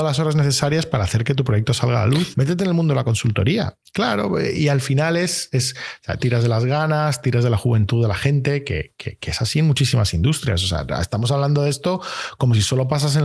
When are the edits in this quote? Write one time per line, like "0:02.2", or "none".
0:02.3
0:03.8
0:06.2